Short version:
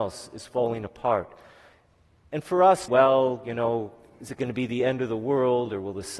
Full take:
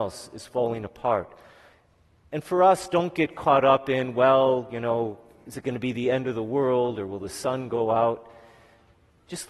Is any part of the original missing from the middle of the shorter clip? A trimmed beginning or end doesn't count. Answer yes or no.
yes